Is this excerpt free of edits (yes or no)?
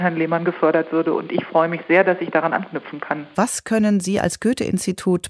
no